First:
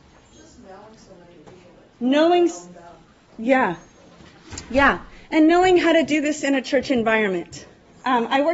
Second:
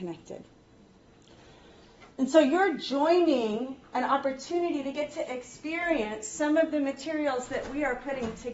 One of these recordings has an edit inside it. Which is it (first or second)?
first